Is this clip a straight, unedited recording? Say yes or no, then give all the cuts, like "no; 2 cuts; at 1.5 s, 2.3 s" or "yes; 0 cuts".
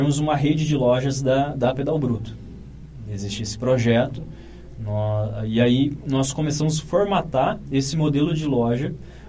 yes; 0 cuts